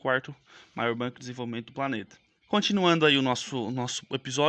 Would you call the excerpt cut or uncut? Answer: cut